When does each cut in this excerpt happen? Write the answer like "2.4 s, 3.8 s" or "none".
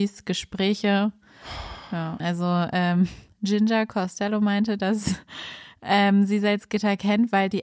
2.2 s